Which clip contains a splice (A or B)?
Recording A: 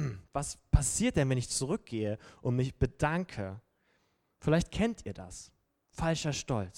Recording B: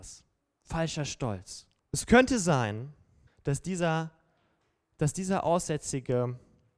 B